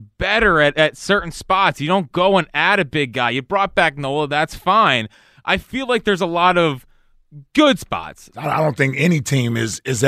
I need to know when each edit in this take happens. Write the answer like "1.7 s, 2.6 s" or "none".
8.3 s

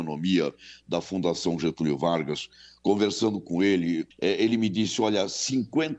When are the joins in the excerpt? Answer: 4.1 s

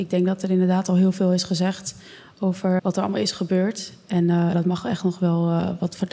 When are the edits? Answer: 2.8 s, 4.5 s

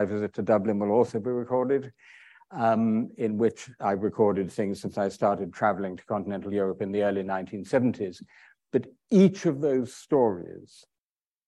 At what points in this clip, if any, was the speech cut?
none

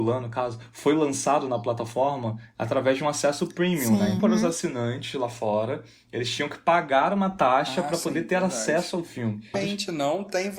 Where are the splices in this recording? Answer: 4.2 s, 9.5 s

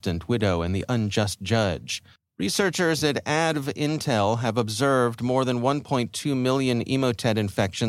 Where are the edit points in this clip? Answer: 2.2 s

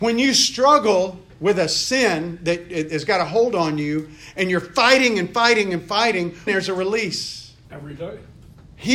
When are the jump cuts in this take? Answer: 6.5 s, 7.6 s

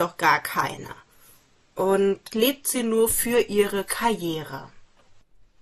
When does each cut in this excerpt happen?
2.3 s

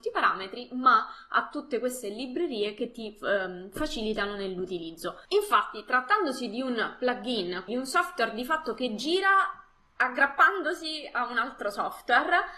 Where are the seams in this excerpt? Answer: 5.2 s, 7.7 s

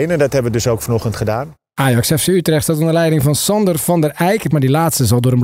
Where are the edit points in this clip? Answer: 4.5 s

